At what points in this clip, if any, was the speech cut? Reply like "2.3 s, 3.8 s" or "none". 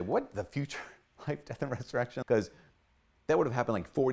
2.2 s